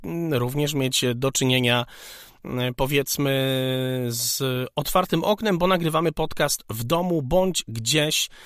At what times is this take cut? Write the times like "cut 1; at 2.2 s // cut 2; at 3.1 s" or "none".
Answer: none